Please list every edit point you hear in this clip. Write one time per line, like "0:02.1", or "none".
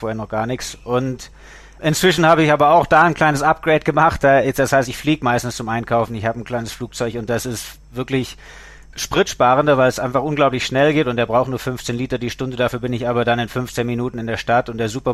none